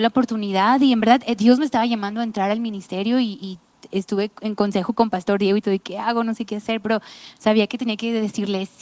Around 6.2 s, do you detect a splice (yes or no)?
no